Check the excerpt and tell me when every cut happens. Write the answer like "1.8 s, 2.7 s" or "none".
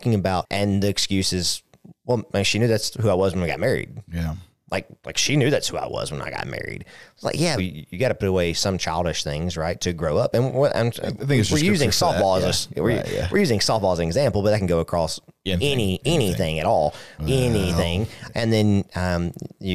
7.6 s, 17.2 s, 18.3 s

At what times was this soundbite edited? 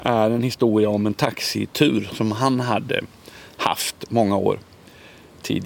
none

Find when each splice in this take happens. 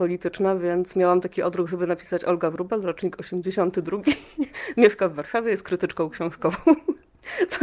none

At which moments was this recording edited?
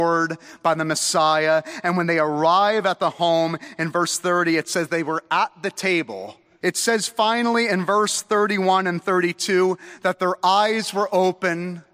6.6 s

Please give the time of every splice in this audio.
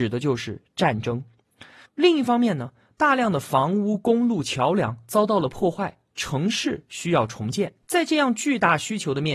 1.8 s, 7.8 s

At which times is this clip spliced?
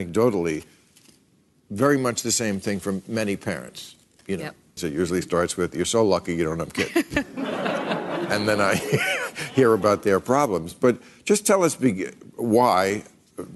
4.8 s

